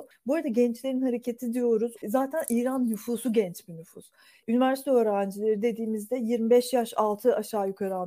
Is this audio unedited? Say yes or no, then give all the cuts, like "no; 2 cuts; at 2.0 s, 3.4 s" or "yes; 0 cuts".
no; 1 cut; at 2.0 s